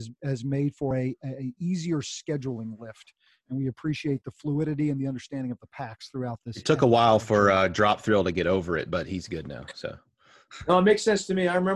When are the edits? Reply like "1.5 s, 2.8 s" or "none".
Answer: none